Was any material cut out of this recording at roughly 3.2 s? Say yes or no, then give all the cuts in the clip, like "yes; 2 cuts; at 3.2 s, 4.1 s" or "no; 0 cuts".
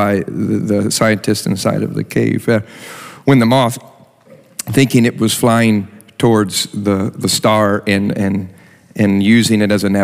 no; 0 cuts